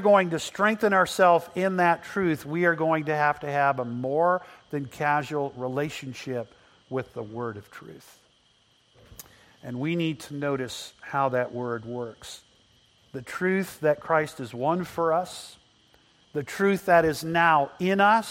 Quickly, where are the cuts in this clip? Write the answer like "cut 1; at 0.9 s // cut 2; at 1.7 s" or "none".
cut 1; at 13.0 s // cut 2; at 16.2 s